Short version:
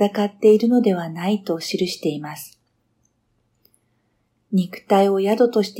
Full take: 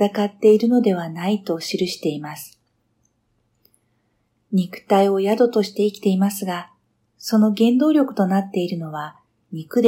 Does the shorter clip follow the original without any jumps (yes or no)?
yes